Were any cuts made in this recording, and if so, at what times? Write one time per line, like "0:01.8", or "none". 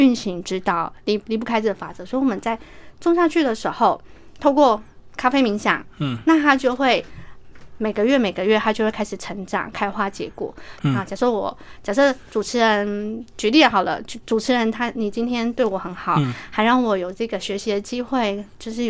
0:10.8